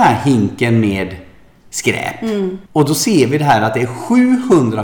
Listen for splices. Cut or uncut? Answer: cut